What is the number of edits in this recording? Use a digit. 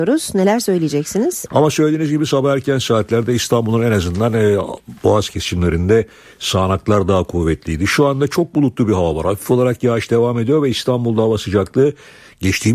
1